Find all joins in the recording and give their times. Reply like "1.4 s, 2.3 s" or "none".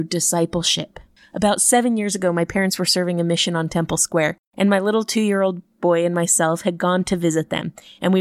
none